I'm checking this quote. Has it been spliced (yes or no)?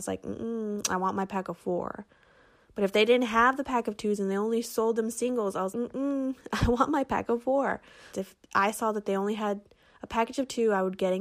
yes